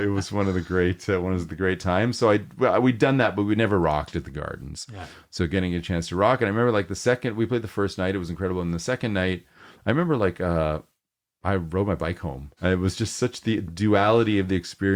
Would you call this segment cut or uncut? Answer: cut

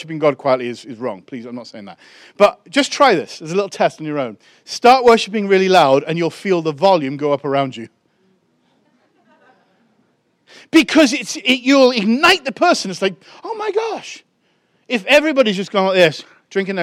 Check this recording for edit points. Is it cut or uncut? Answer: uncut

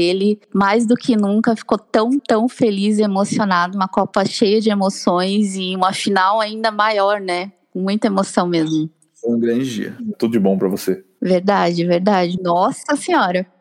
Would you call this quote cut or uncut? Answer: cut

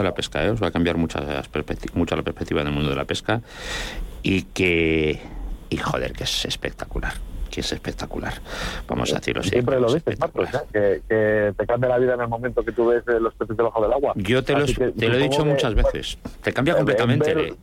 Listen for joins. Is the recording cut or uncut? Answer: cut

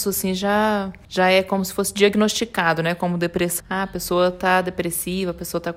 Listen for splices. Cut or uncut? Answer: cut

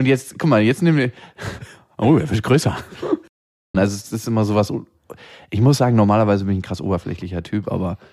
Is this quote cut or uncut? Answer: cut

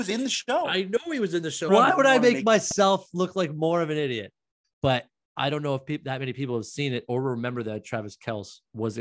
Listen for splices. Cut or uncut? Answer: cut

